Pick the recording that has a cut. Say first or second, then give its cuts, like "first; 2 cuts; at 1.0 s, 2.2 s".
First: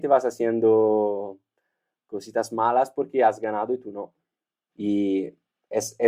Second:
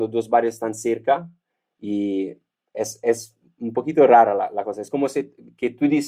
first; 1 cut; at 4.7 s